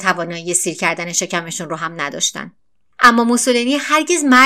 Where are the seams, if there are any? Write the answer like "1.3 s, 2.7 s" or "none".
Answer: none